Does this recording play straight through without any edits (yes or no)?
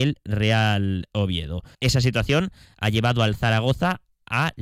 no